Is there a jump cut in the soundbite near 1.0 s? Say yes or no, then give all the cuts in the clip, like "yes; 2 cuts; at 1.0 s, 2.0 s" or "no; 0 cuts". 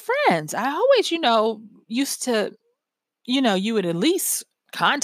no; 0 cuts